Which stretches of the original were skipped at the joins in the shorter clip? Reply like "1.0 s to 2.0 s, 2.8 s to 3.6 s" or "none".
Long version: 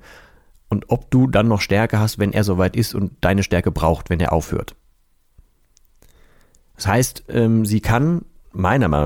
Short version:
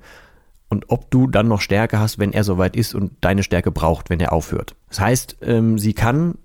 4.8 s to 6.7 s